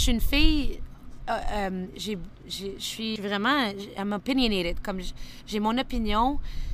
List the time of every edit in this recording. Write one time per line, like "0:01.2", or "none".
0:03.2